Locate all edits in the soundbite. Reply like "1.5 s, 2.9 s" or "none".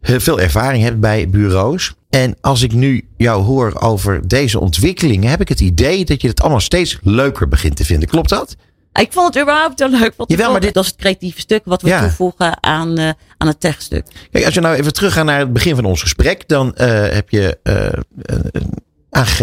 2.0 s, 10.7 s